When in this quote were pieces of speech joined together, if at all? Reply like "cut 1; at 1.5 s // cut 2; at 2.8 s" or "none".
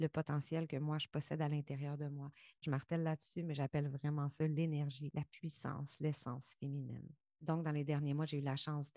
none